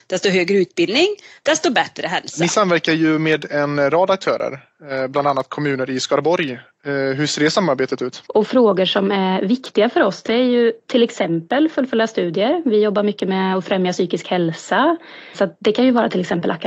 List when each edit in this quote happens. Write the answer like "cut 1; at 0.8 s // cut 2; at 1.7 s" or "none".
cut 1; at 8.3 s // cut 2; at 15.3 s